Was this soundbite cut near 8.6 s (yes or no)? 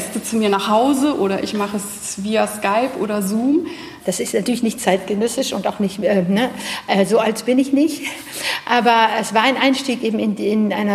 no